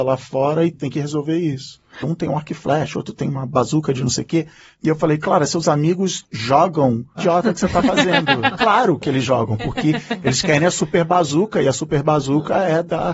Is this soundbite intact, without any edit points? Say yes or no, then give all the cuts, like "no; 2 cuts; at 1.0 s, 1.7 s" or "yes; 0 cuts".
no; 2 cuts; at 2.0 s, 7.2 s